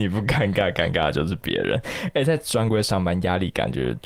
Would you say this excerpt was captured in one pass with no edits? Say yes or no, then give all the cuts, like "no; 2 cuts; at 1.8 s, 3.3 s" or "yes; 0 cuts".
yes; 0 cuts